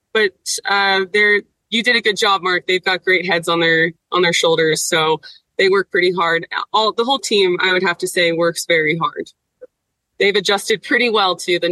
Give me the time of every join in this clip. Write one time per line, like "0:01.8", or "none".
none